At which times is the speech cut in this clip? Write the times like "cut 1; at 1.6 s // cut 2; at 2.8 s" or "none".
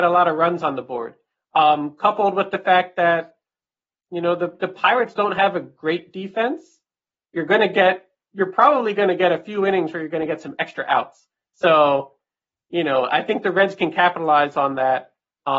none